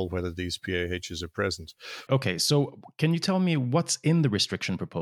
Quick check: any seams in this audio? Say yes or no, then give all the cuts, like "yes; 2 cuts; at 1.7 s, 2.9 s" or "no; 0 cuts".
yes; 1 cut; at 2.1 s